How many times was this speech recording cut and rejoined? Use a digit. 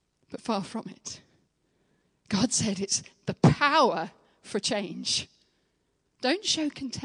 1